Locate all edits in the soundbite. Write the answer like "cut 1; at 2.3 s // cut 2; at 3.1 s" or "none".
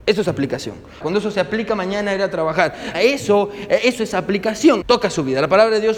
cut 1; at 1.0 s // cut 2; at 2.9 s // cut 3; at 4.8 s